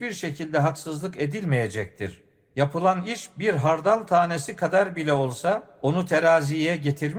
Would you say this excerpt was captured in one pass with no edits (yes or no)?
yes